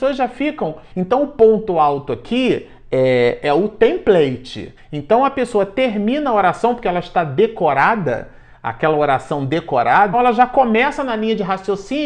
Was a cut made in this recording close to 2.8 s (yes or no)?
no